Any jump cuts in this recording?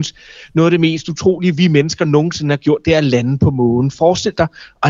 no; 0 cuts

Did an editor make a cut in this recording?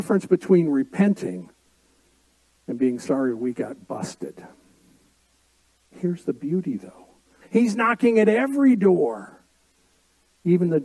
yes; 2 cuts; at 5.9 s, 7.4 s

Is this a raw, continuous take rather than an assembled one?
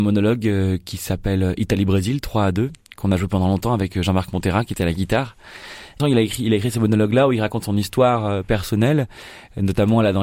no; 1 cut; at 6.0 s

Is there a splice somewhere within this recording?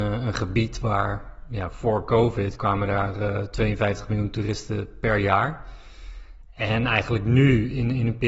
no; 0 cuts

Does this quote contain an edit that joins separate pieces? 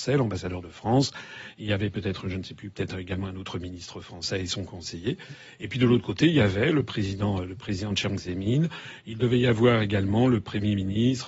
no; 0 cuts

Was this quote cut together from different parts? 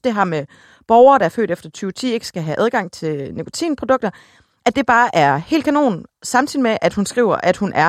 no; 0 cuts

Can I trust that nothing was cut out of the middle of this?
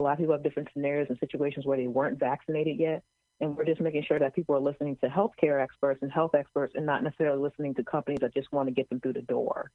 yes; 0 cuts

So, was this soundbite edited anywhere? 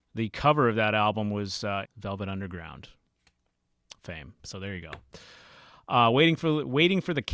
yes; 2 cuts; at 1.8 s, 4.4 s

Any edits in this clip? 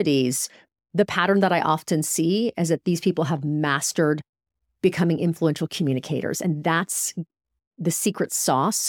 no; 0 cuts

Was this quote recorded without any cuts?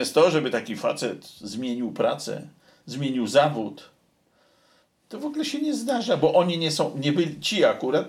yes; 0 cuts

